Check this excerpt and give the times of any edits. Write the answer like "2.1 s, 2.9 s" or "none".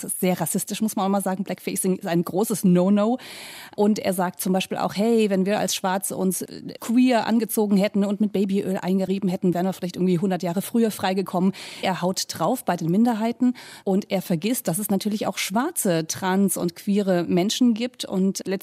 11.8 s